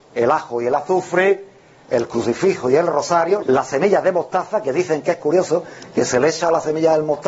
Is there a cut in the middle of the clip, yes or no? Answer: yes